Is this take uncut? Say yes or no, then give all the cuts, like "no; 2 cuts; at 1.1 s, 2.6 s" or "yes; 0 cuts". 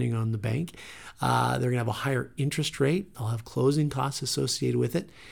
yes; 0 cuts